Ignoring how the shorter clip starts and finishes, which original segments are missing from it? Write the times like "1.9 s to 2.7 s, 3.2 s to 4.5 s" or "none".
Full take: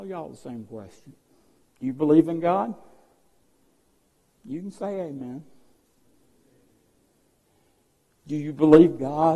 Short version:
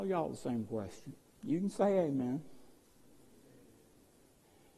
1.3 s to 4.3 s